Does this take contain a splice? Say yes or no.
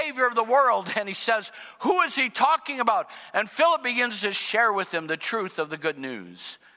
no